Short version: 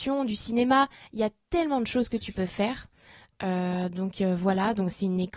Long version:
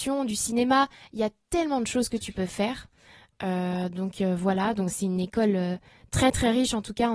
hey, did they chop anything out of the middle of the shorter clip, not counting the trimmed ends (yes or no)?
no